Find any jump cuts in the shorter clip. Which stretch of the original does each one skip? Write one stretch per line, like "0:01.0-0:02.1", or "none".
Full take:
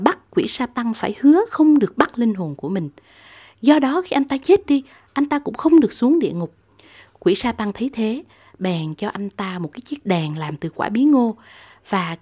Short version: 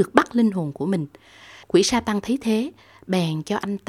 0:03.5-0:07.1

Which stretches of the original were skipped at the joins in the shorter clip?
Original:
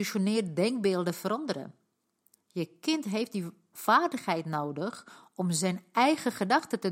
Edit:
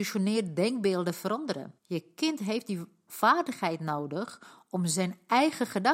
0:01.8-0:02.4

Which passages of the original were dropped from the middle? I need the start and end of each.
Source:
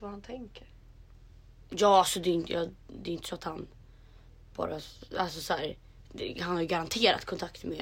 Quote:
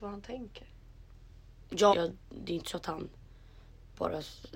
0:01.9-0:02.5

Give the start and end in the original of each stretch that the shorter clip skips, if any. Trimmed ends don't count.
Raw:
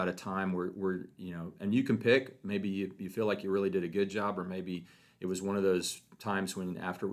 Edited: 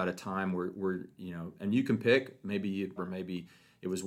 0:03.0-0:04.3

